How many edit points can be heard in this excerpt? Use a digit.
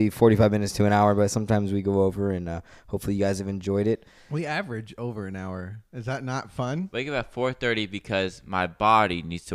1